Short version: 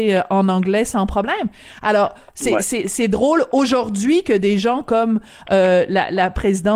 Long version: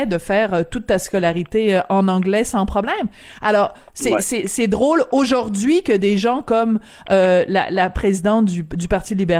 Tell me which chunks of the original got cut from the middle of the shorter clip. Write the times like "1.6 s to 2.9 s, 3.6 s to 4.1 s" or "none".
none